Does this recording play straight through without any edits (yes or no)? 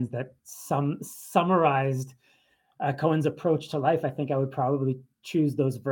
yes